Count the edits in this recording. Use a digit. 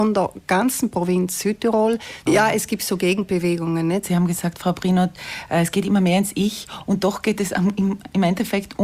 2